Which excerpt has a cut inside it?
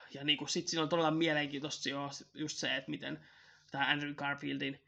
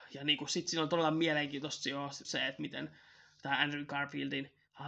second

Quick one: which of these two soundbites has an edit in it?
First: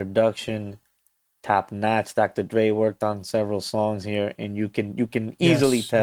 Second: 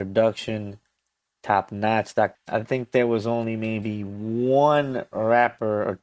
second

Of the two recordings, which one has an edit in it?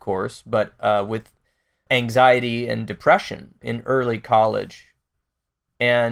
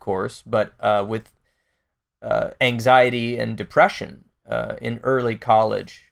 first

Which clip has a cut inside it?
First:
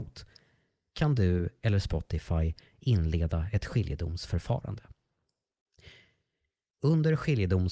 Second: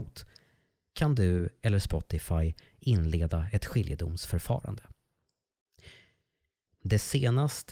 second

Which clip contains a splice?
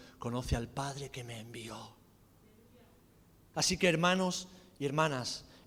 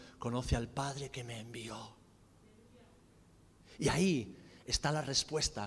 first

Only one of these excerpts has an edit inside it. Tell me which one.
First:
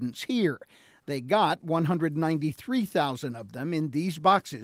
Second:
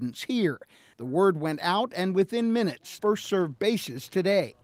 second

